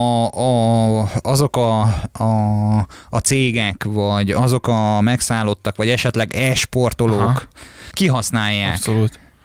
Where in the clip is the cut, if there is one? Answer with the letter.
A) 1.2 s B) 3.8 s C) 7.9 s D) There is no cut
C